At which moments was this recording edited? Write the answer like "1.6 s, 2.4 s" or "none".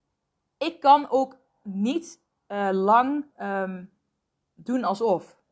3.3 s